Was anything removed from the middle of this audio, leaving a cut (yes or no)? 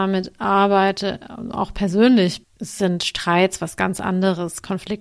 yes